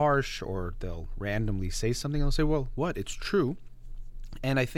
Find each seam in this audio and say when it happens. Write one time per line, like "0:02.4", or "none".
none